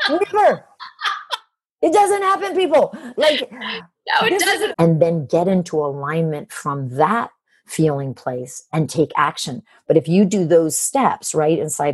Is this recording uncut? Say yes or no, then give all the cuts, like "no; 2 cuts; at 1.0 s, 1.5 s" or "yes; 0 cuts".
no; 1 cut; at 4.7 s